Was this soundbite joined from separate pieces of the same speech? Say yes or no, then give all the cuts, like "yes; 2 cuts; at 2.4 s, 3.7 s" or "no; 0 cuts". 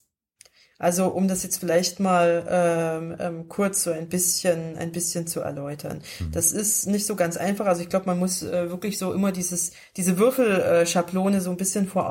no; 0 cuts